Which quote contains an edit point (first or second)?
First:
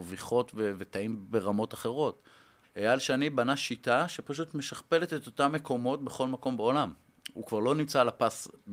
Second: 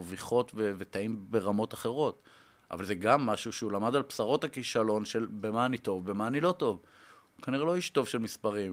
first